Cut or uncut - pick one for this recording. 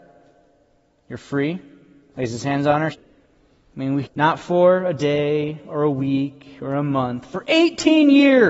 cut